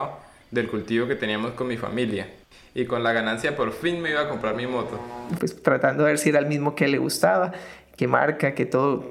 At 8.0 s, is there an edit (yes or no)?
yes